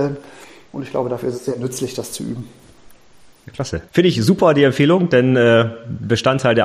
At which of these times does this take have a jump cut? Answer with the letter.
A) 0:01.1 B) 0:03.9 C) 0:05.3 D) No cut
B